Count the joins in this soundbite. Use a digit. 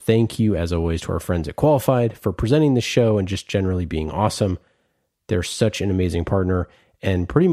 0